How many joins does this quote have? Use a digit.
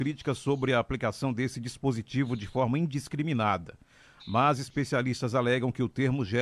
1